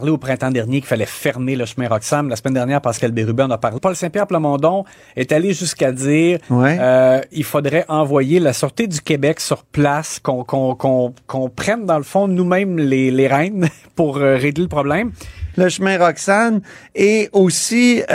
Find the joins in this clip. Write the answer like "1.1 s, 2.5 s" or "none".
3.8 s, 15.5 s